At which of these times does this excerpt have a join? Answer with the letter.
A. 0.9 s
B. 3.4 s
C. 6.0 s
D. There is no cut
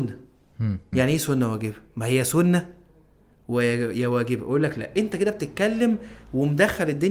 A